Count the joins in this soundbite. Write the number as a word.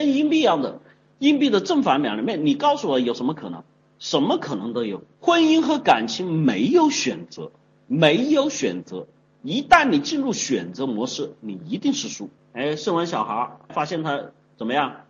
three